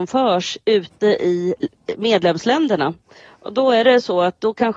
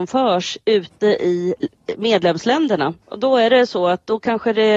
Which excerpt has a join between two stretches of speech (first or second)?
second